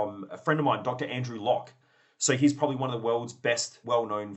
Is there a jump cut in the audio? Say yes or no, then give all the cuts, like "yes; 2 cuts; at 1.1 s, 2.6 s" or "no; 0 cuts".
no; 0 cuts